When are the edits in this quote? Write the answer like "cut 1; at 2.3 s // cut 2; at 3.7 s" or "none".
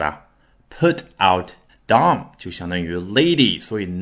cut 1; at 1.7 s